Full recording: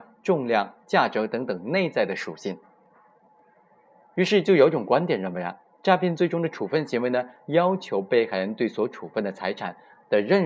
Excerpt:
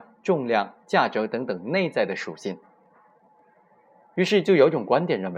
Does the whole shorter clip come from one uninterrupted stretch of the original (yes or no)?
yes